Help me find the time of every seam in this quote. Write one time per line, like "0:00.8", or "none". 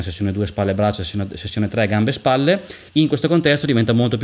0:02.9